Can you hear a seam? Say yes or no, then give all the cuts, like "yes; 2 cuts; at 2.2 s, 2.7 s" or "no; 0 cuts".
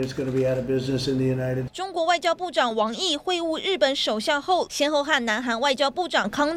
yes; 2 cuts; at 1.7 s, 4.7 s